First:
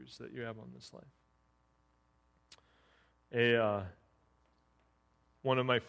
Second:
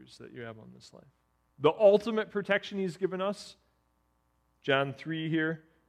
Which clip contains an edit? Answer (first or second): second